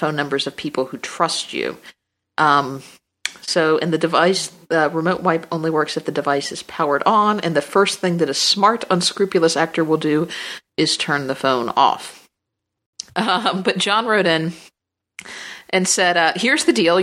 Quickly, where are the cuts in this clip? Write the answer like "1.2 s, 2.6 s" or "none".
13.1 s